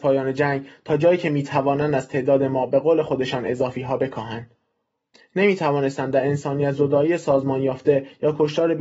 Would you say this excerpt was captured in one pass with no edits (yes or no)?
yes